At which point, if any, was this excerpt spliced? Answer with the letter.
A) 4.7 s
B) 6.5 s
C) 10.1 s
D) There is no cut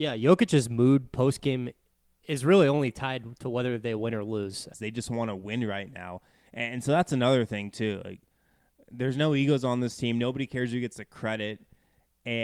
A